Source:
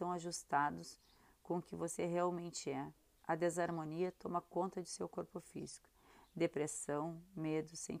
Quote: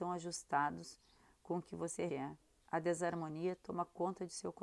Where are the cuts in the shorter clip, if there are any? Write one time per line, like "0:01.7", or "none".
0:02.1

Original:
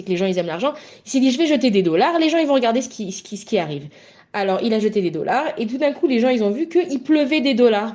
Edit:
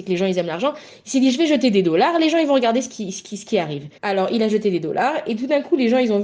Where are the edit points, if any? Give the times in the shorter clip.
0:04.0

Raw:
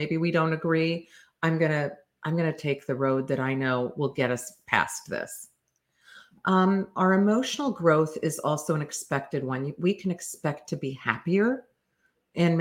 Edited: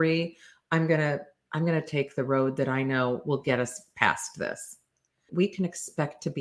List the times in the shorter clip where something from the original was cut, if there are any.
0:05.3

